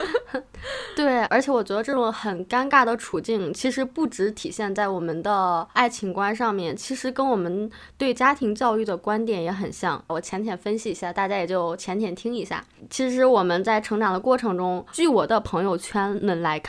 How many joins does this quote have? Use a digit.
1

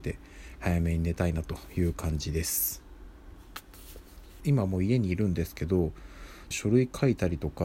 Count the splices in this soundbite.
2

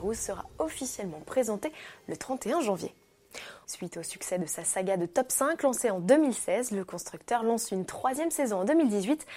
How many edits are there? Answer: 1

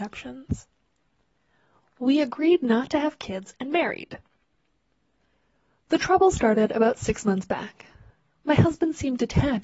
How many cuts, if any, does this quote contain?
0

